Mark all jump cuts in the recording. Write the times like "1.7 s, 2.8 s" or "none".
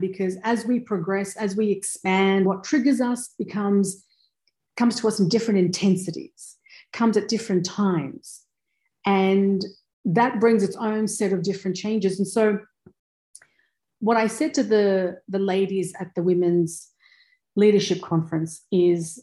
2.4 s